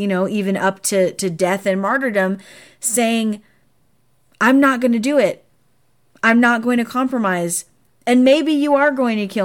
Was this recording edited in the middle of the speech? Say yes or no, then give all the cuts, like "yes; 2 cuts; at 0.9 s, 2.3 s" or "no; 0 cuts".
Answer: no; 0 cuts